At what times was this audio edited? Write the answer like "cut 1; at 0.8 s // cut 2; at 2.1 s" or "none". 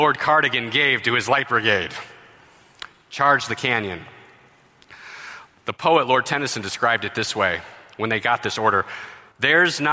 none

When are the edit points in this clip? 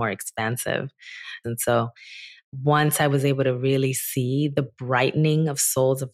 cut 1; at 1.4 s

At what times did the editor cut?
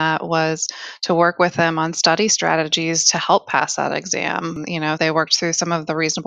cut 1; at 5.0 s

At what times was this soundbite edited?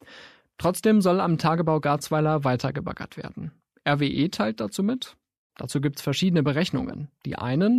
cut 1; at 3.8 s // cut 2; at 5.5 s

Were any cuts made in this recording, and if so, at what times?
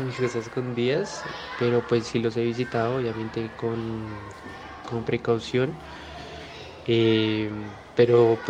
none

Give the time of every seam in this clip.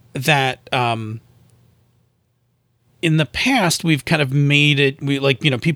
none

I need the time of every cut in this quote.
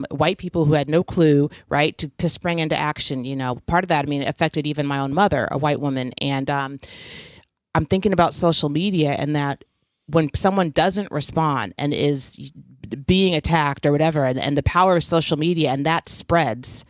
none

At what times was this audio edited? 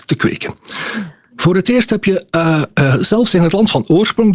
none

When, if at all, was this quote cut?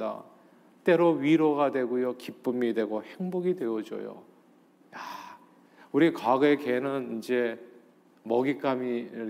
none

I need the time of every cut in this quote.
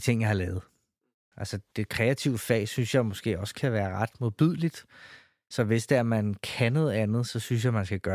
cut 1; at 1.7 s

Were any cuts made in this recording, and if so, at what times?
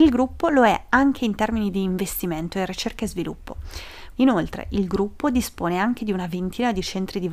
cut 1; at 4.2 s

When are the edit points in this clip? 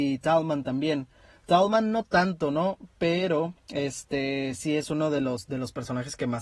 none

